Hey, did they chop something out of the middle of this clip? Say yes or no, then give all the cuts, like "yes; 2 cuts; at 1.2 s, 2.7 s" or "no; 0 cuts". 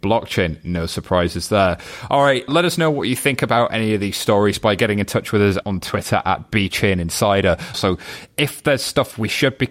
yes; 3 cuts; at 2.5 s, 5.6 s, 7.7 s